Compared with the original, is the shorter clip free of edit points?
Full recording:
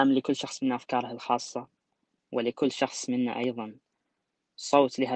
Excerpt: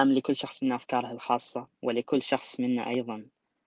no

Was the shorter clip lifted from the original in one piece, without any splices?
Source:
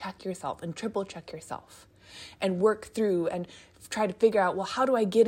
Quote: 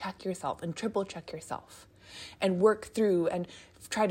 yes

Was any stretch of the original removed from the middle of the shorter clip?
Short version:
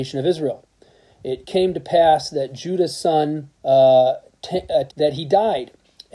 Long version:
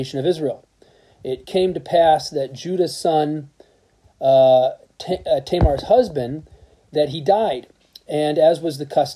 yes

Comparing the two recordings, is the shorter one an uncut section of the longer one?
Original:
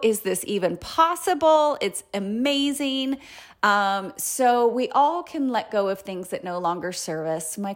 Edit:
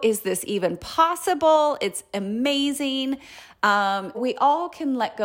no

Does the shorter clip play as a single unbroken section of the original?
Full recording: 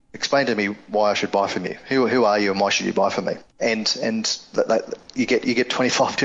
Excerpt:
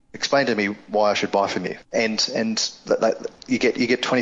no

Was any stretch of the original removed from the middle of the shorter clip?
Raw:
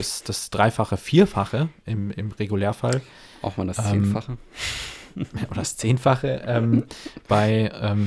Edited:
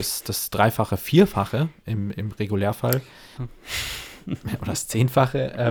yes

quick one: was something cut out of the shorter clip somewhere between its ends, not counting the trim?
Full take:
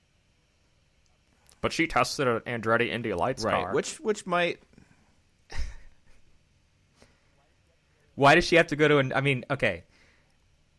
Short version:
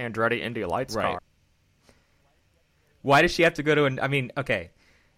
yes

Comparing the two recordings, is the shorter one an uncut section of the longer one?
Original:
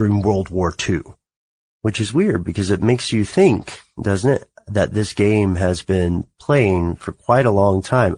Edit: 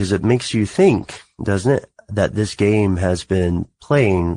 yes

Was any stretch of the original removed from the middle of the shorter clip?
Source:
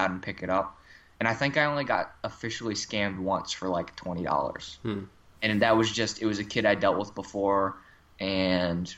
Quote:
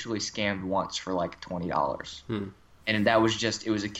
no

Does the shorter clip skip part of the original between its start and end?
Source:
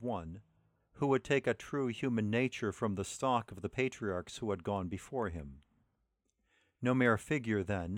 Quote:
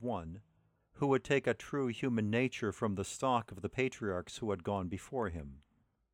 no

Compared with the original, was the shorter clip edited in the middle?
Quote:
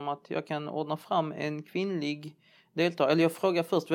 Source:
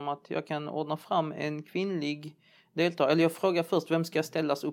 no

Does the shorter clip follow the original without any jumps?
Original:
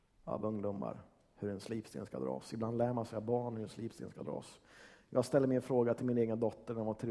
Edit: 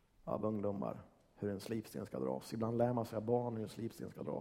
yes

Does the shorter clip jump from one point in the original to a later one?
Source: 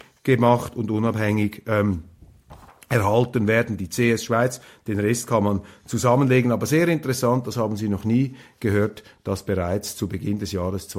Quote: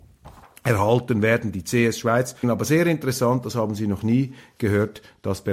yes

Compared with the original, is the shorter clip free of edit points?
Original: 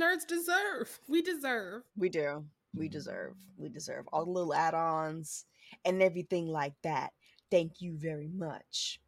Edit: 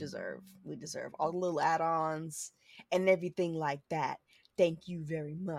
yes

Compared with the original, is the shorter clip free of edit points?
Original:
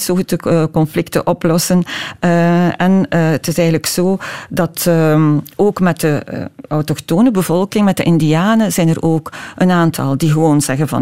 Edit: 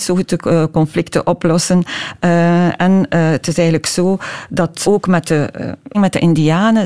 no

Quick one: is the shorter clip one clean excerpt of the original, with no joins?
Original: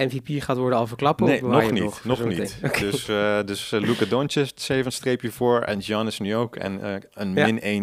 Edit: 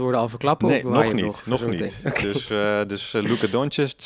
yes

